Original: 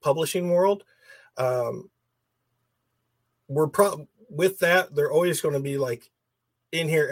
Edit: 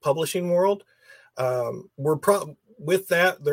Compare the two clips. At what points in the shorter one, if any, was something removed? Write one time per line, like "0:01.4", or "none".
0:01.9